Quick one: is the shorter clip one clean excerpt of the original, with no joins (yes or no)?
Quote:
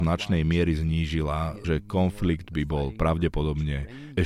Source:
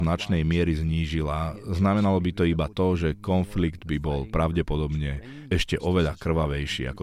no